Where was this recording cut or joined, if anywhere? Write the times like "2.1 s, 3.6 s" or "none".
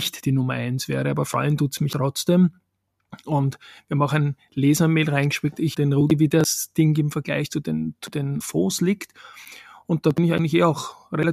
5.7 s, 8.4 s